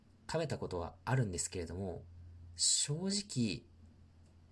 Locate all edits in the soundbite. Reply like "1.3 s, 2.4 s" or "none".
none